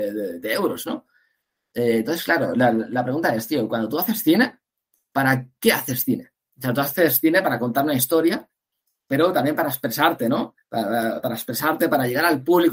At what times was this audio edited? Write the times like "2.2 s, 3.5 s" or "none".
none